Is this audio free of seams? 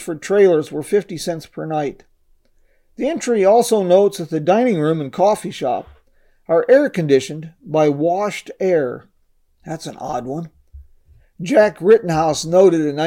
yes; 0 cuts

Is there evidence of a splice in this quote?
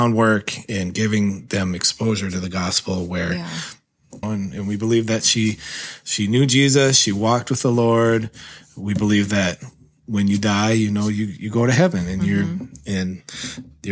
yes; 1 cut; at 4.2 s

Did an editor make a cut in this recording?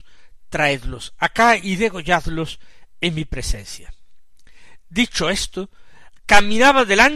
no; 0 cuts

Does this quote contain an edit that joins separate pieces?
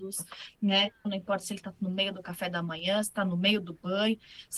yes; 1 cut; at 1.0 s

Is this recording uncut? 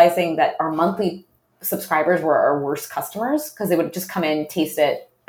yes; 0 cuts

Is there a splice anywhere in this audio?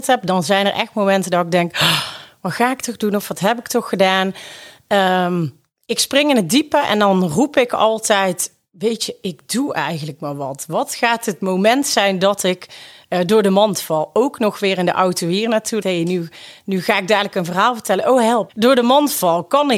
yes; 2 cuts; at 15.8 s, 18.5 s

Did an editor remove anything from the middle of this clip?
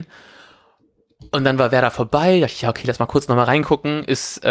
no; 0 cuts

